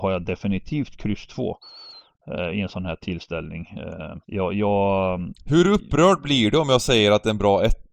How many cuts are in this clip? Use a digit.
1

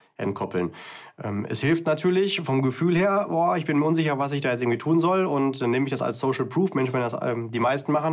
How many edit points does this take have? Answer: 0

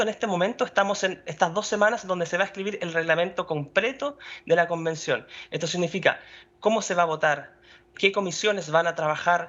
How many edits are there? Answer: 1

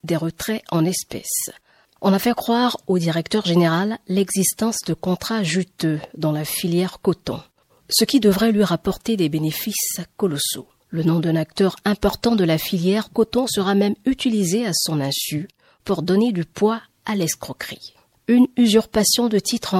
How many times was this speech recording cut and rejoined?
0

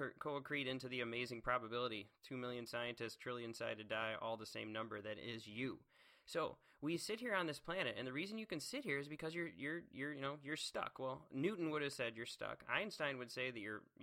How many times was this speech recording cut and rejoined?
0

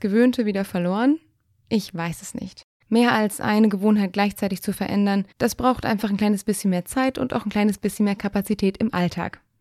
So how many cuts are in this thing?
2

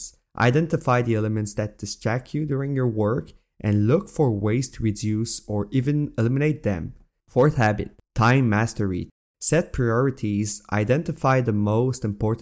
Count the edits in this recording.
1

